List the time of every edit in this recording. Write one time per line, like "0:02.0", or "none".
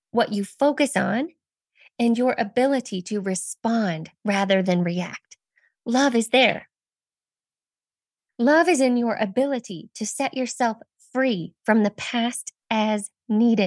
none